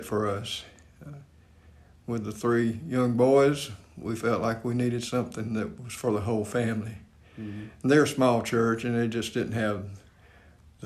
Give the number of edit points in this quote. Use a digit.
0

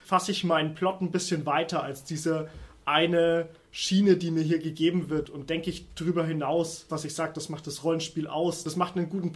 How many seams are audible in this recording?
1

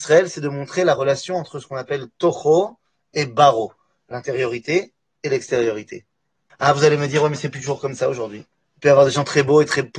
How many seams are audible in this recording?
1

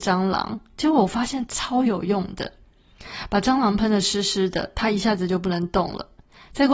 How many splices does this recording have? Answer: 0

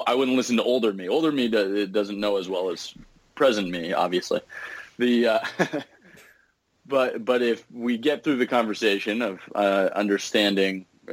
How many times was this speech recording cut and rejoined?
0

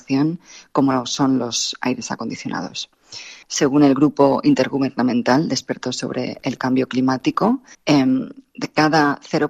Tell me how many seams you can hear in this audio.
2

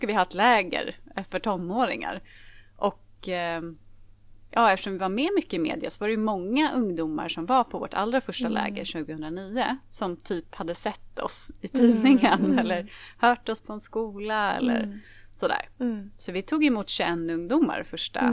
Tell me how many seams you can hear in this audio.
0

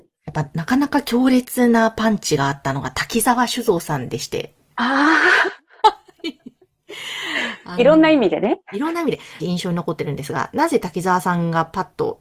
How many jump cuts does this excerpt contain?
1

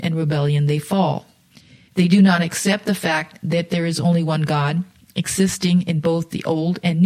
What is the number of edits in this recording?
1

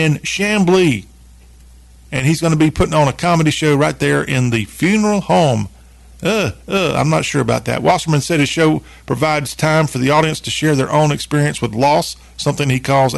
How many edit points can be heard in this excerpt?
0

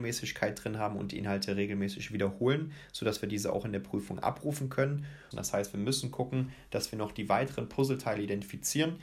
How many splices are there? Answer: 1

